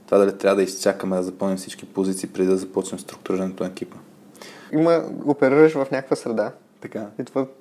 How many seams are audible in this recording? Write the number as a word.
one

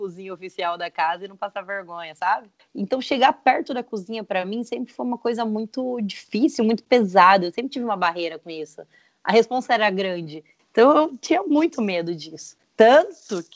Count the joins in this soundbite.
two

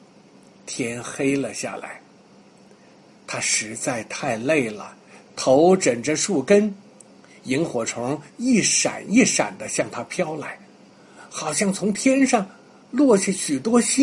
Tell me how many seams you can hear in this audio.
one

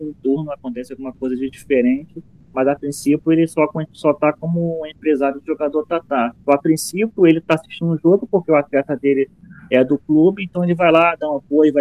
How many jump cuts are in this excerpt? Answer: one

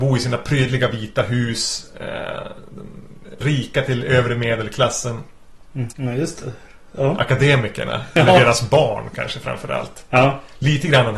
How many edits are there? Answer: two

